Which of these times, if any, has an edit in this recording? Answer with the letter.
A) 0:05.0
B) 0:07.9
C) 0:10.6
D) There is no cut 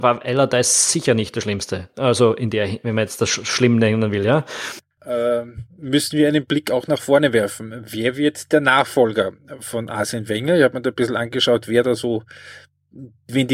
A